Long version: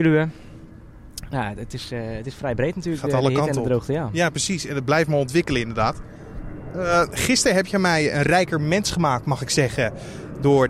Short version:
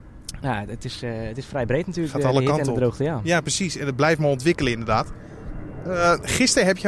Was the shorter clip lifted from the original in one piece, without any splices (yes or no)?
yes